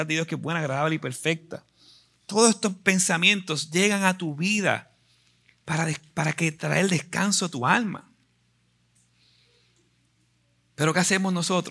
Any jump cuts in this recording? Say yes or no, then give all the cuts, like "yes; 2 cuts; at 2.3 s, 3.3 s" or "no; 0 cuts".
no; 0 cuts